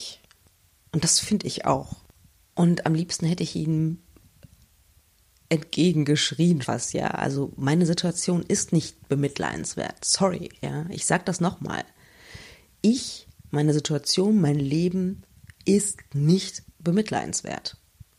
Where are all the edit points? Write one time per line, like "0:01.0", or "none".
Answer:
0:06.6